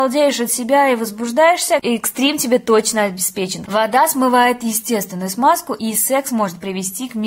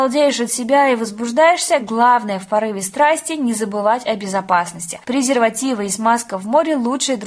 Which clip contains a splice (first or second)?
first